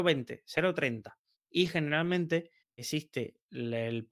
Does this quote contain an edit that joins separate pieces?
yes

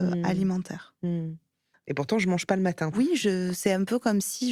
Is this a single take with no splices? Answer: no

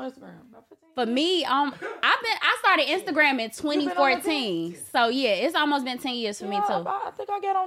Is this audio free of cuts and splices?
yes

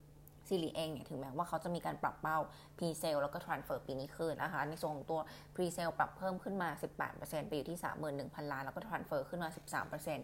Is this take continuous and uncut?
no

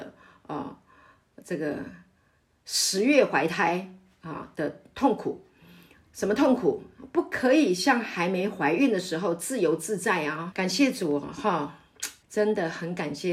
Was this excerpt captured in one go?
no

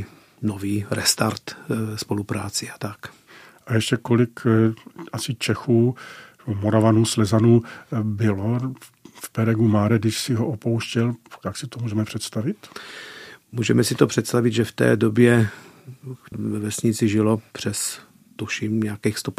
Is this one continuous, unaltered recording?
no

